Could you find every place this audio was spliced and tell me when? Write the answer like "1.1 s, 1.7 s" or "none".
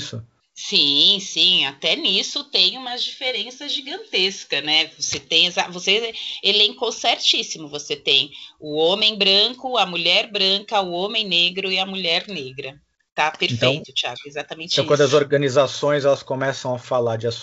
none